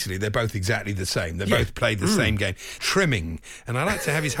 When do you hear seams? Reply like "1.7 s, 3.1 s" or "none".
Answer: 2.8 s